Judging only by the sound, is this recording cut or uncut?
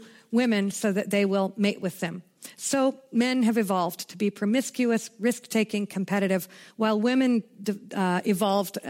uncut